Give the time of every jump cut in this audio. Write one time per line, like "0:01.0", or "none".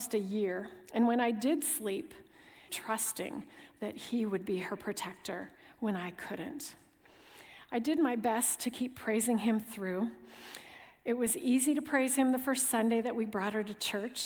0:02.7